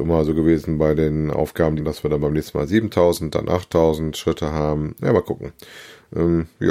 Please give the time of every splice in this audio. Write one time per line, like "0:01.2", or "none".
0:01.8

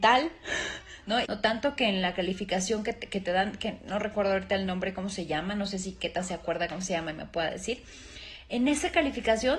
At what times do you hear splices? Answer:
0:01.2

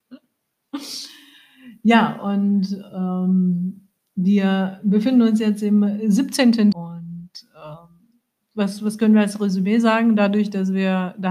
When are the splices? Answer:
0:06.7
0:08.4

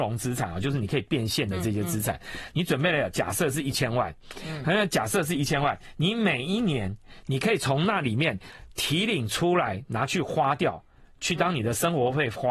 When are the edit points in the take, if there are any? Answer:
none

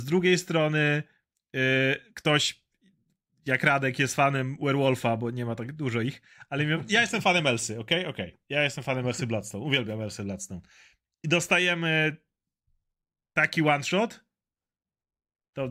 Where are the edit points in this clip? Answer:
none

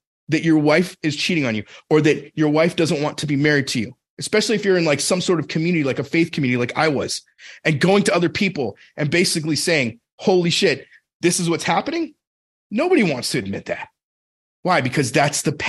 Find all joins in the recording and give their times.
none

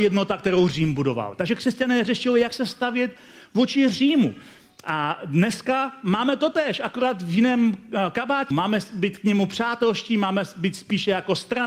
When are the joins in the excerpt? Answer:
0:08.5

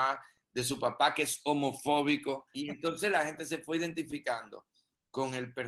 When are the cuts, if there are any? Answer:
0:02.5

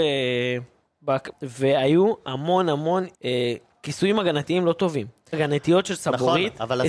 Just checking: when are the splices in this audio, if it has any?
0:01.3
0:03.1
0:05.3

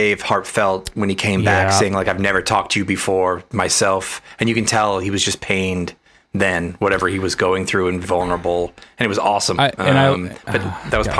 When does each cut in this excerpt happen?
0:08.0
0:09.6

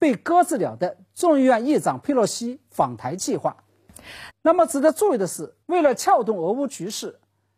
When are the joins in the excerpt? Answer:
0:04.3
0:05.6

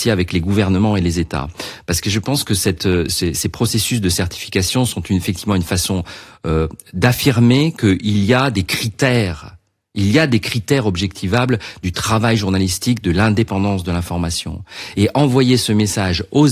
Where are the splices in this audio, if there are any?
none

